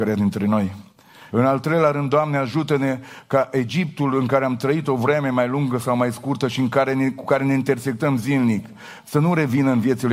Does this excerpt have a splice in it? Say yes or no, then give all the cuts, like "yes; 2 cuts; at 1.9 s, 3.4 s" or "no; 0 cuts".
yes; 1 cut; at 1.3 s